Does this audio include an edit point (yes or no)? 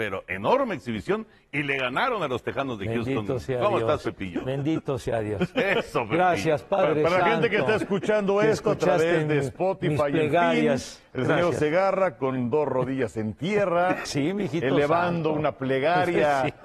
yes